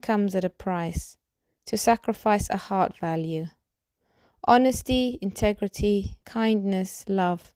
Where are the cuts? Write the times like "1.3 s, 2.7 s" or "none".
6.2 s